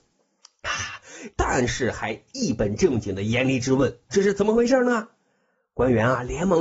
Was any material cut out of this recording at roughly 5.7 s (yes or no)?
no